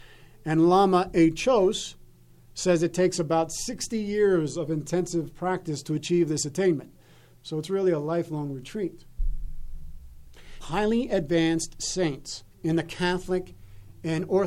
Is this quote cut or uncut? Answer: cut